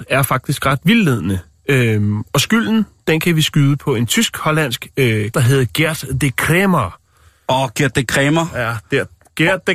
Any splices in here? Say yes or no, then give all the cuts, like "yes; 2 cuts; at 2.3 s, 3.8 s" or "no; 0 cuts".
yes; 1 cut; at 5.3 s